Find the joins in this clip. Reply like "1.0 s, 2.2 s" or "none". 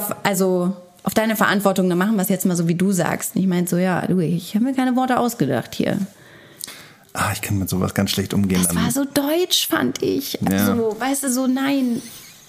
none